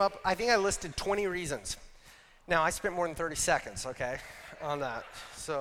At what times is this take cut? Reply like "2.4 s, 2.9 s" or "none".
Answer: none

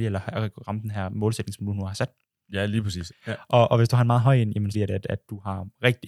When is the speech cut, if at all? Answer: 3.1 s, 4.7 s

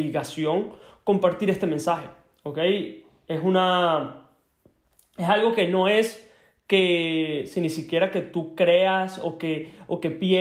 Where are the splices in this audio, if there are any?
none

